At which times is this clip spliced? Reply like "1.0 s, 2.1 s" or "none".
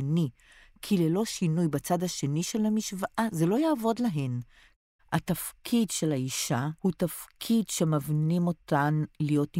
5.0 s, 6.8 s